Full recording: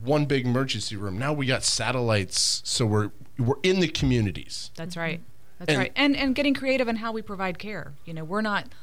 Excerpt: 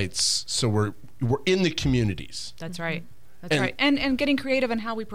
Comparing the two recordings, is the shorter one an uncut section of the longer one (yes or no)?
yes